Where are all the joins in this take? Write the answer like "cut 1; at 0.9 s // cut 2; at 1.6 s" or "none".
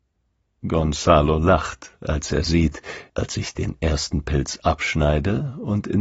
cut 1; at 3.1 s